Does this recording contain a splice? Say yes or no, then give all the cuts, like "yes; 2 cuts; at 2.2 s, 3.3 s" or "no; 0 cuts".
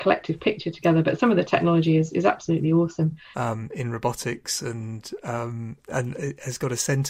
yes; 1 cut; at 3.3 s